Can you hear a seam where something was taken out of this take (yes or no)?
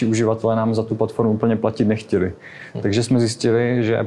no